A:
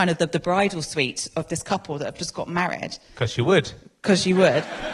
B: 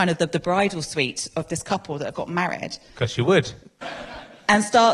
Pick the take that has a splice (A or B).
B